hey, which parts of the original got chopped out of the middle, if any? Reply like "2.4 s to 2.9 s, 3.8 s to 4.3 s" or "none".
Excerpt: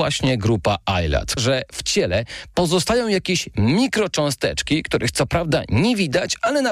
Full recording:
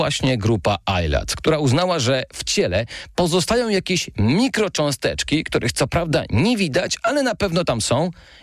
1.4 s to 2.0 s